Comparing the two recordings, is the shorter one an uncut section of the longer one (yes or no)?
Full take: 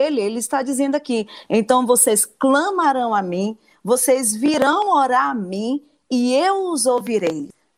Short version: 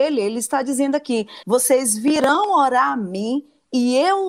no